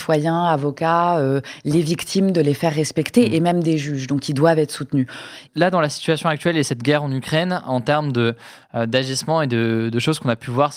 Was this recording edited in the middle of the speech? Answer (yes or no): yes